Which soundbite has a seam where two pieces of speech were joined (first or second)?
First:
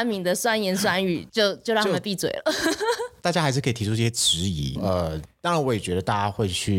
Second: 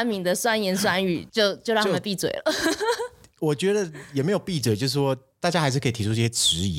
first